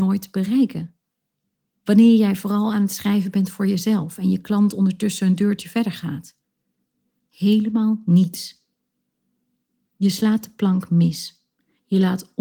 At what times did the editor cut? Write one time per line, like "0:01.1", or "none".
none